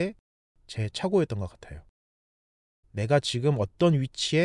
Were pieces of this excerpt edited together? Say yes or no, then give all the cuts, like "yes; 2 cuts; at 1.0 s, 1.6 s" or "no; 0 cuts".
yes; 1 cut; at 2.8 s